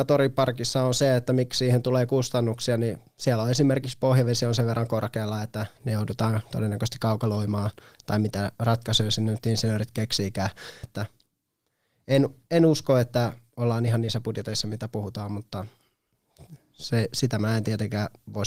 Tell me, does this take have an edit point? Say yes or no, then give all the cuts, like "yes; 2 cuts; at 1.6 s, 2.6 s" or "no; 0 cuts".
yes; 1 cut; at 10.8 s